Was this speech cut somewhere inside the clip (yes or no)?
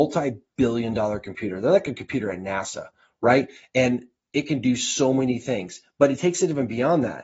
no